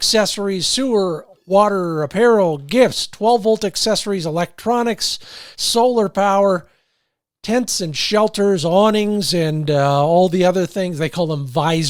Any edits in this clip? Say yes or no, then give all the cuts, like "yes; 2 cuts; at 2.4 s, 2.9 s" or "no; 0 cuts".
no; 0 cuts